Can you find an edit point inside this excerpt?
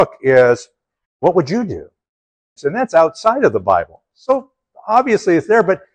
yes; 1 cut; at 2.6 s

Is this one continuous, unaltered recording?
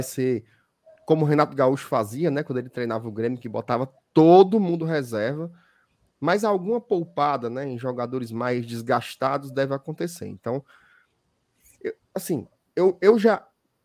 yes; 0 cuts

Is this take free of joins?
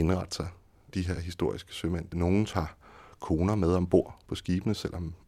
yes; 0 cuts

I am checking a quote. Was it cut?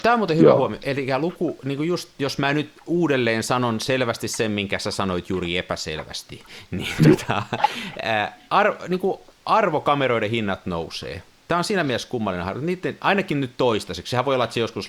no; 0 cuts

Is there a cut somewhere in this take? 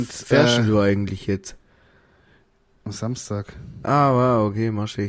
no; 0 cuts

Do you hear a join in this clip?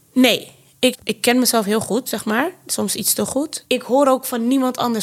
yes; 2 cuts; at 0.9 s, 3.6 s

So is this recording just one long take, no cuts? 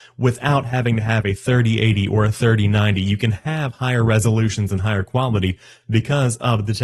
yes; 0 cuts

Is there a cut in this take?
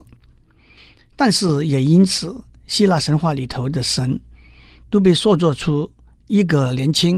yes; 1 cut; at 1.0 s

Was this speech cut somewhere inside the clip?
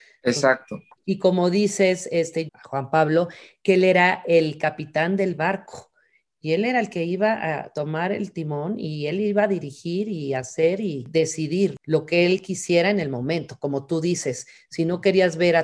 yes; 2 cuts; at 1.0 s, 2.5 s

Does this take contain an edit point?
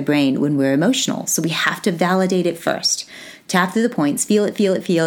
no; 0 cuts

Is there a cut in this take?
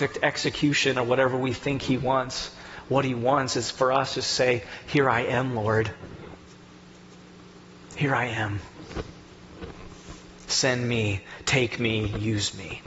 no; 0 cuts

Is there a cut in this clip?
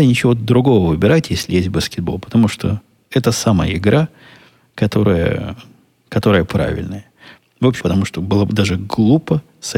yes; 1 cut; at 7.8 s

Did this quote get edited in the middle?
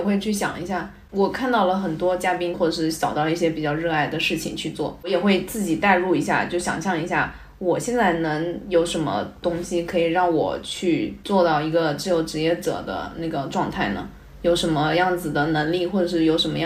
yes; 1 cut; at 2.5 s

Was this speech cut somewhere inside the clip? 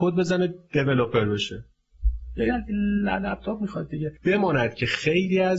yes; 1 cut; at 4.2 s

